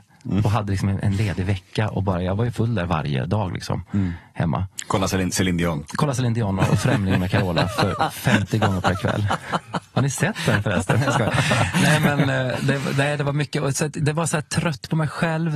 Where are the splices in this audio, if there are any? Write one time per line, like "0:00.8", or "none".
0:06.7